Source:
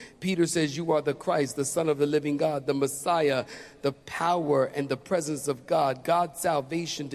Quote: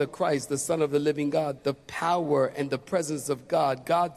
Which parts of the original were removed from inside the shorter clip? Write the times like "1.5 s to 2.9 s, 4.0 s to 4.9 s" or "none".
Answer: 2.6 s to 3.8 s